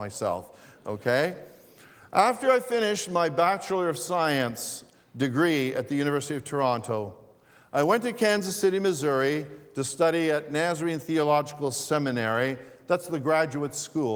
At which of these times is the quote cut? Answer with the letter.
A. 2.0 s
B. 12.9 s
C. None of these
C